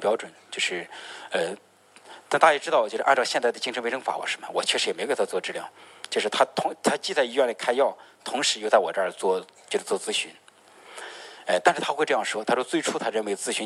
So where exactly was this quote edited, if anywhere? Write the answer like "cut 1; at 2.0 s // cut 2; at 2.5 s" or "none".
cut 1; at 4.2 s